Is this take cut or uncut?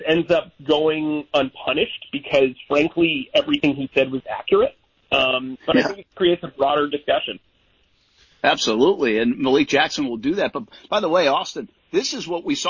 uncut